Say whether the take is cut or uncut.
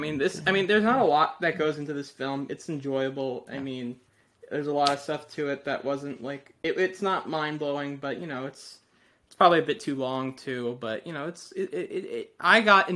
uncut